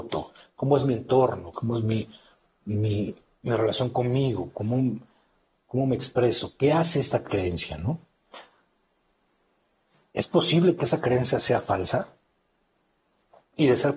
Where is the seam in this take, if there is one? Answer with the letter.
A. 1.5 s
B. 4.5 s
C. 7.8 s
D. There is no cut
A